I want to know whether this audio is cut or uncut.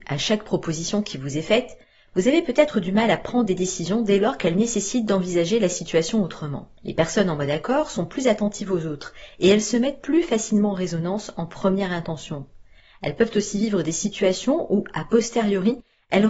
cut